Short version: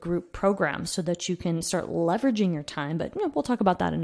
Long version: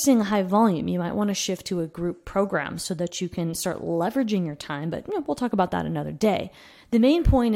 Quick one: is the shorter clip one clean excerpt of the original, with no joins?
yes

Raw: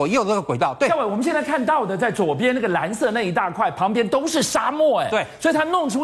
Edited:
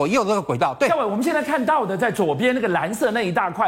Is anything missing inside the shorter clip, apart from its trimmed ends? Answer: no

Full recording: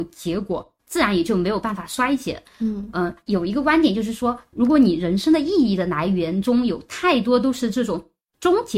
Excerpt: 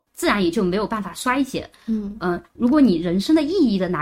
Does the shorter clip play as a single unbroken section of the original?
no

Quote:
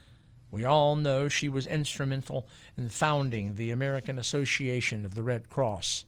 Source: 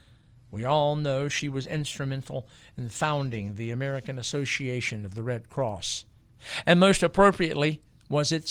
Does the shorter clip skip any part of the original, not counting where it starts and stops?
no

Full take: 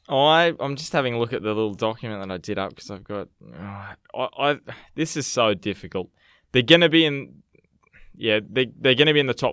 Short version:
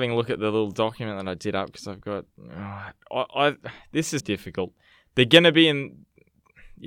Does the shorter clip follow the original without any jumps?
no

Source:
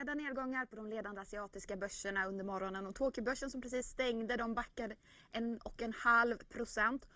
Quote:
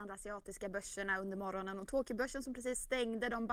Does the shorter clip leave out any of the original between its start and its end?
no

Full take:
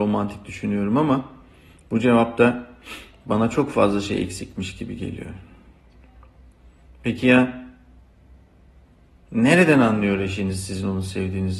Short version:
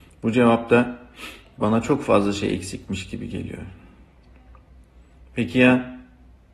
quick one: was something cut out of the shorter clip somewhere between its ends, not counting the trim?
no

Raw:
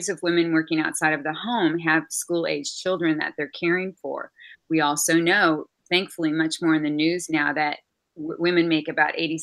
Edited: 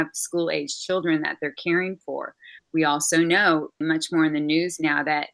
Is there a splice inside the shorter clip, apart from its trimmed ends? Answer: yes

